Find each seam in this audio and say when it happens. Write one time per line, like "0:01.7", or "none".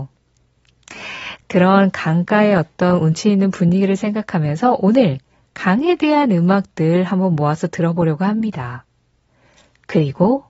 none